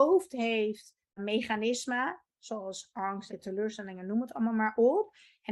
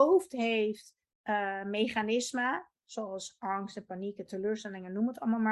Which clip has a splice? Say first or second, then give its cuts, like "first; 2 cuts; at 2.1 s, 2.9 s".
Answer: first; 2 cuts; at 1.2 s, 3.3 s